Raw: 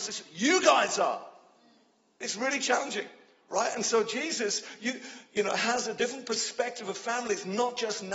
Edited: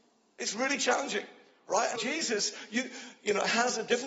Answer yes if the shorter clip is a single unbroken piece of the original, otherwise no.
no